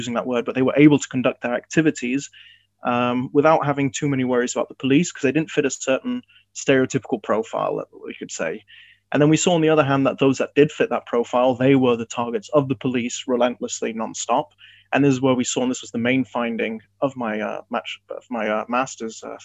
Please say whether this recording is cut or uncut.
uncut